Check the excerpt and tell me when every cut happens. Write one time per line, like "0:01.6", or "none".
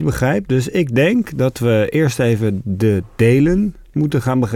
none